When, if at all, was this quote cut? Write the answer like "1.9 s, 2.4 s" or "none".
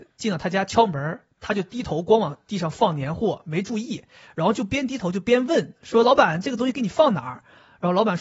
none